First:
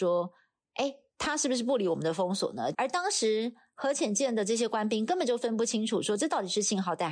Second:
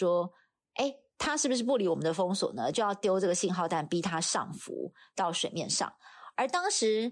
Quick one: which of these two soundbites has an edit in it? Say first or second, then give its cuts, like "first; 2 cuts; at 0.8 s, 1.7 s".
first; 1 cut; at 2.7 s